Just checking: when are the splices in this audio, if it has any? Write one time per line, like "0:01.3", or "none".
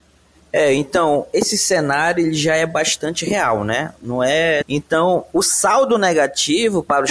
0:04.6